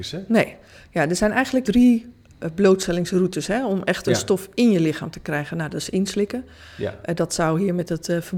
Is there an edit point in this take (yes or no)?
yes